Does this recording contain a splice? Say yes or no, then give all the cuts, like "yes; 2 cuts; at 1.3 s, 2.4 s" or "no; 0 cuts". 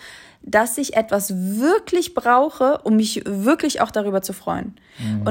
no; 0 cuts